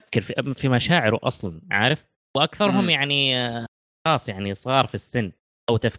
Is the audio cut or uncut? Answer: uncut